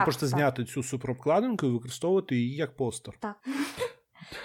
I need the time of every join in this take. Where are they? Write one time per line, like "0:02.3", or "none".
none